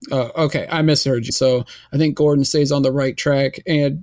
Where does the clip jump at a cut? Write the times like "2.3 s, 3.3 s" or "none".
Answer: 1.3 s